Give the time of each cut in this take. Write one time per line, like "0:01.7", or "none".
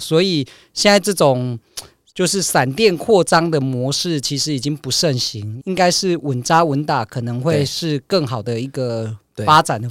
0:05.6